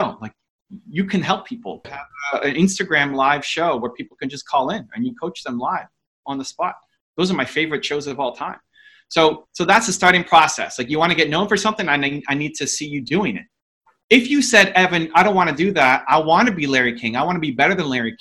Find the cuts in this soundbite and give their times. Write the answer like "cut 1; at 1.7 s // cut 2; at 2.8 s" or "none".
cut 1; at 1.8 s